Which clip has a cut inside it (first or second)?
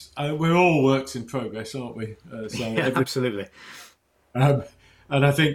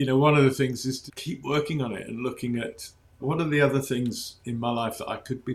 second